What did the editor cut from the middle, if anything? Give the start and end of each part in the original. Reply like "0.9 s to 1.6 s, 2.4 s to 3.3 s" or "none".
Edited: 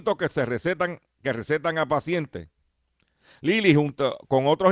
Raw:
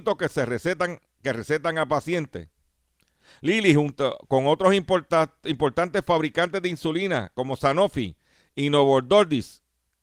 none